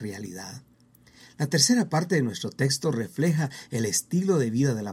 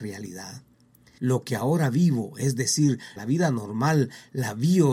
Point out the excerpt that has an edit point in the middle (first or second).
second